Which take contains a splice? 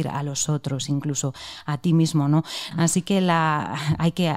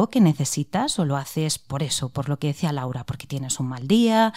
first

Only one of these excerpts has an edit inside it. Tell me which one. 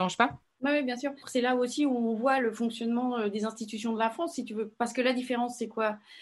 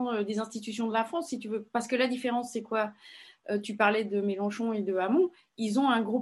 first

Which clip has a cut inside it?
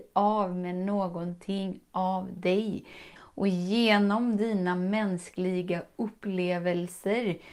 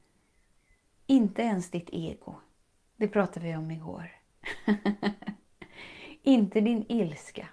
first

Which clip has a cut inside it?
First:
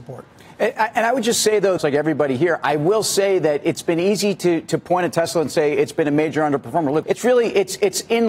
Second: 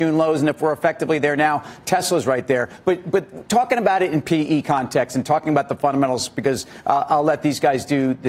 first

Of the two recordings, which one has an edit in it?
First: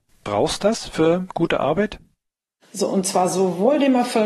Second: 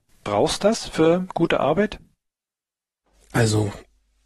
first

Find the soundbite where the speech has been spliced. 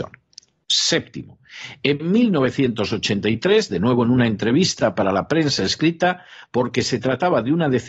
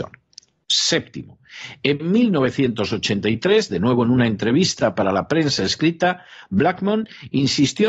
first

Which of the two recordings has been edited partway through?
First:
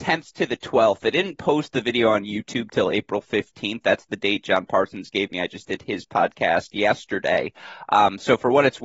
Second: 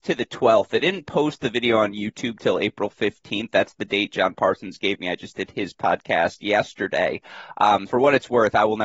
second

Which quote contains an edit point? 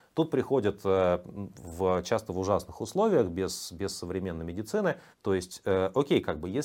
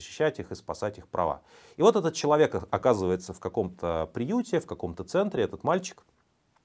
first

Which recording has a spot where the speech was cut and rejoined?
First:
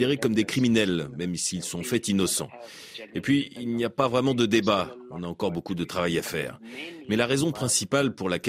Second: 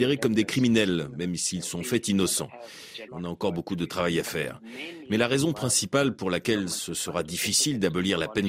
second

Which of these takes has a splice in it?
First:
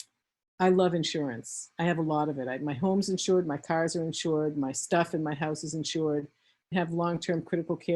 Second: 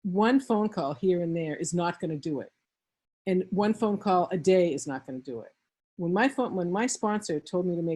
first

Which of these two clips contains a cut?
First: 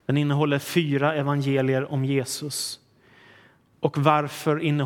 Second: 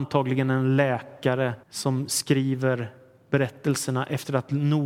second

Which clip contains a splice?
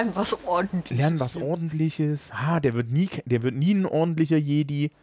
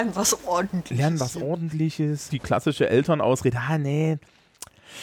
second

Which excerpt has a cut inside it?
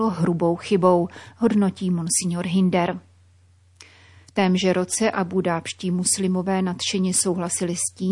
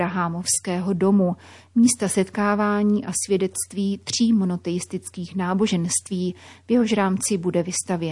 first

